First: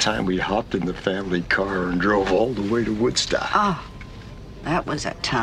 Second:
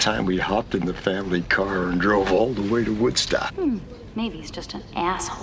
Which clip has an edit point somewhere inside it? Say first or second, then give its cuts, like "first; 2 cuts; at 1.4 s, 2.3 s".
second; 1 cut; at 3.5 s